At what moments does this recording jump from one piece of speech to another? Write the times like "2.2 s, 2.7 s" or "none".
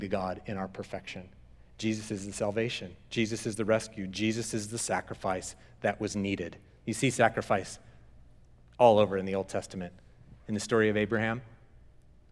none